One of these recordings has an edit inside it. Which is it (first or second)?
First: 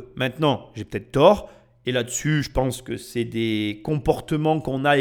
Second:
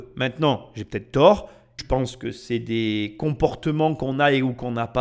second